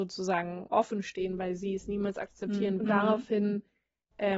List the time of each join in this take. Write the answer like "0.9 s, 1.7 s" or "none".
2.8 s